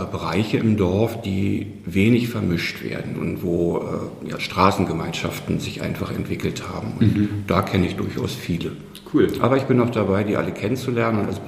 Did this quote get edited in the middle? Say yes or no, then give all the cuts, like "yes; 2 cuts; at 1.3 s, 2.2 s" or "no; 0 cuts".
no; 0 cuts